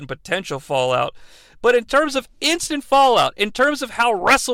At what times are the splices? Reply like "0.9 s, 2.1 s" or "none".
none